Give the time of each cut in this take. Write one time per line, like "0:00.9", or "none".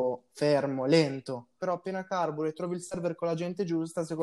0:01.6